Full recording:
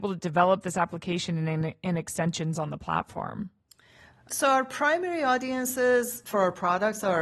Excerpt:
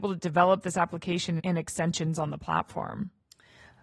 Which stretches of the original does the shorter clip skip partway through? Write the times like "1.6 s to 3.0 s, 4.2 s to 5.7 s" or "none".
1.4 s to 1.8 s